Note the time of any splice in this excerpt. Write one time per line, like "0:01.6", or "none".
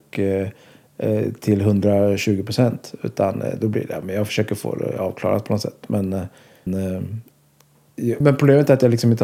0:06.7
0:08.2